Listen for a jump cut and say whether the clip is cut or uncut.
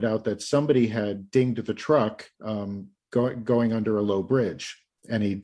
cut